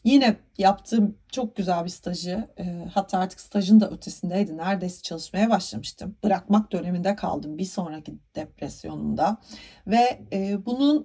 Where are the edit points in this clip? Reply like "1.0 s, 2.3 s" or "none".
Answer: none